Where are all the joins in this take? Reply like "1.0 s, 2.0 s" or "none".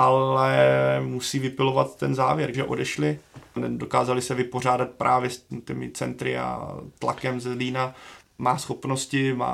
2.5 s, 8.2 s